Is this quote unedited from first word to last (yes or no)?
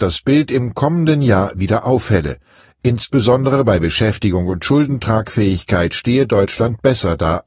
yes